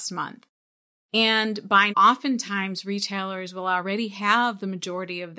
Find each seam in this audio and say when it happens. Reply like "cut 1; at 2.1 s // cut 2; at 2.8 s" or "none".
cut 1; at 1.9 s